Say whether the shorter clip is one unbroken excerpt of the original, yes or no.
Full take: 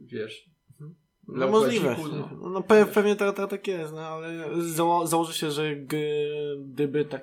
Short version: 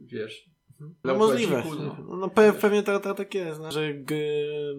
no